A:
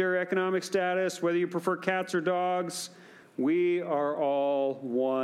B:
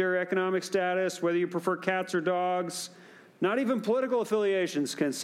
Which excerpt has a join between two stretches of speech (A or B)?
A